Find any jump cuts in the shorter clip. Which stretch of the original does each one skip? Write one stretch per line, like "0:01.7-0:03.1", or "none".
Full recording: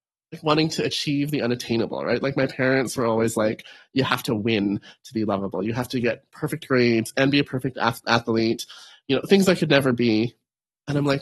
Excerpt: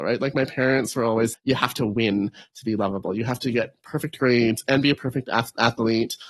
0:03.3-0:03.8